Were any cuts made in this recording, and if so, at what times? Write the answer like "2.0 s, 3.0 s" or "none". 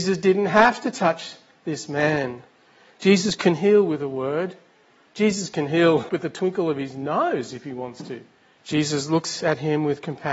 6.1 s, 8.6 s